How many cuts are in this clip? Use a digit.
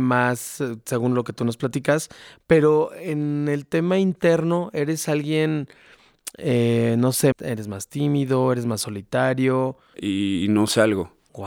2